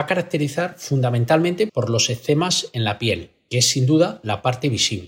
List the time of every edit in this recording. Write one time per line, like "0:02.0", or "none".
0:01.7

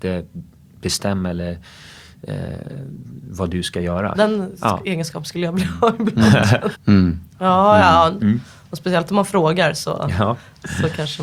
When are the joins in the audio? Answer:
0:04.1
0:06.7
0:08.2

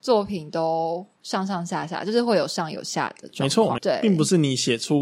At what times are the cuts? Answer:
0:03.8

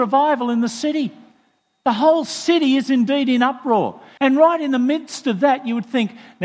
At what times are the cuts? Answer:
0:04.2

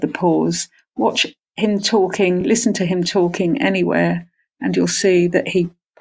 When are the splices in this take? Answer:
none

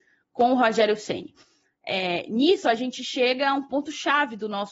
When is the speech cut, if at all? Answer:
none

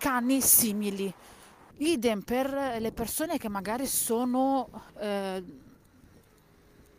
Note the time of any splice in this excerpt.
0:01.7
0:04.9

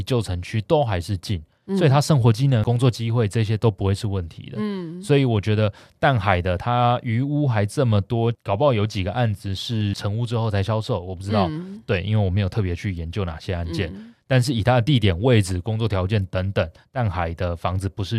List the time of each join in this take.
none

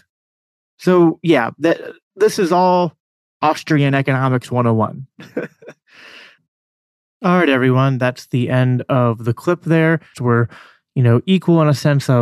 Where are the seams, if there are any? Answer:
0:10.1

